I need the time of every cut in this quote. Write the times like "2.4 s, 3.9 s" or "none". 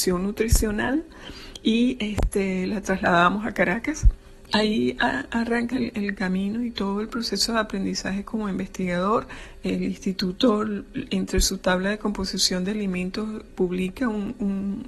4.5 s, 5.7 s, 13.5 s

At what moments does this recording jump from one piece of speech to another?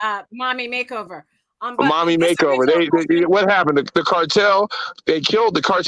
none

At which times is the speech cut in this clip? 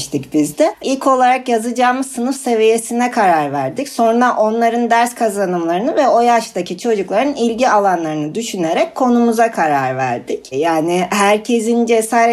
10.5 s

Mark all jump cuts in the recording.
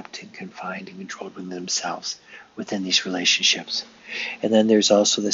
none

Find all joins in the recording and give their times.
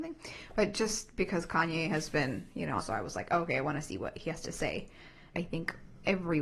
2.8 s, 5.3 s

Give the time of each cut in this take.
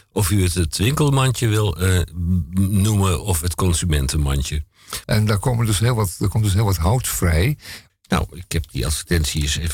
5.0 s, 7.9 s

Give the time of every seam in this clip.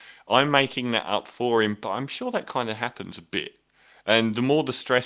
none

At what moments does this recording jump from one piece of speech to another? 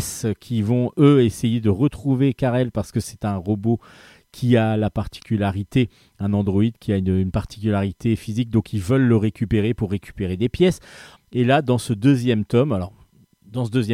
11.2 s

